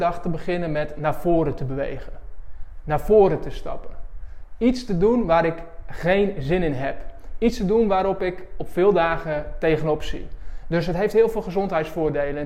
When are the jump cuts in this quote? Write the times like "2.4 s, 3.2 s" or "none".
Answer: 10.6 s